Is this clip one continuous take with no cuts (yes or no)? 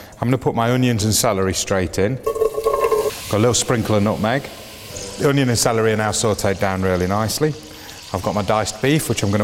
yes